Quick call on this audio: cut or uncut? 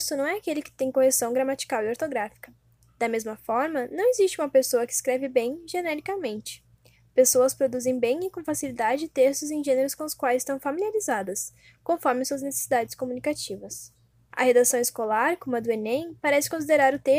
uncut